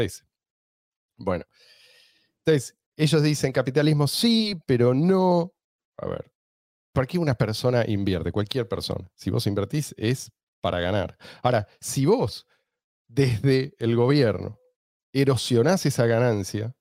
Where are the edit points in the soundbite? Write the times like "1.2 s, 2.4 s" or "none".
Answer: none